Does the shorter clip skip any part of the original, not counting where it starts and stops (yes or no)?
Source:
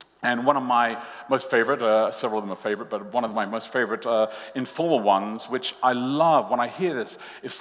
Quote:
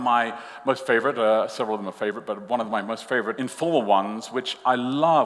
yes